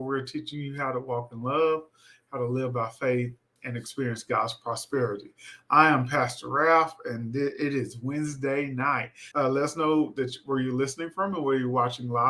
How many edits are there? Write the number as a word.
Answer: one